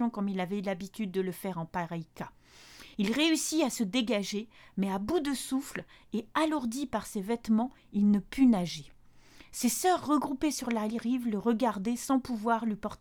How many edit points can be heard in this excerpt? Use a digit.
0